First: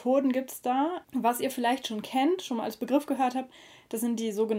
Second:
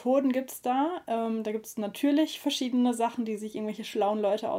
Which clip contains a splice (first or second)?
first